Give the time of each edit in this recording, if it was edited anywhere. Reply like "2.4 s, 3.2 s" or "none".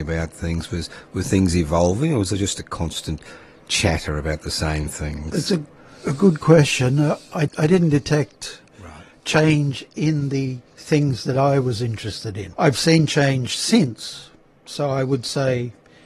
7.5 s, 10.7 s, 12.5 s